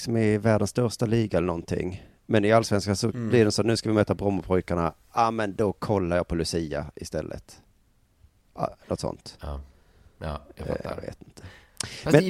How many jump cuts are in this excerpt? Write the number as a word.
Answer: zero